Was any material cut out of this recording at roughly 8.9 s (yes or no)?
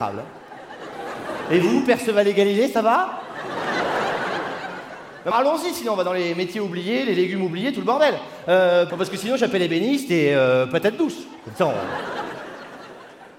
yes